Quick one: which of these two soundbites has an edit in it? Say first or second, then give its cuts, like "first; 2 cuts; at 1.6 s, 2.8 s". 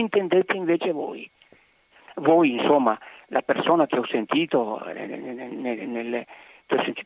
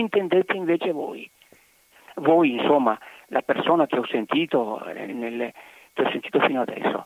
second; 1 cut; at 5.1 s